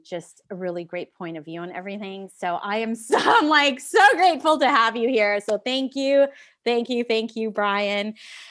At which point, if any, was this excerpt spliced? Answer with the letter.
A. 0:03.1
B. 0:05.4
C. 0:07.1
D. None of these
A